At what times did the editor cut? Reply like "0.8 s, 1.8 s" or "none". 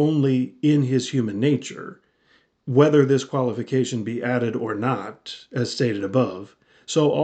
none